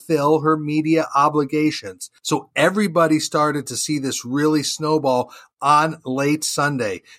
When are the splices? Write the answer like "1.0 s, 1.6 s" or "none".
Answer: none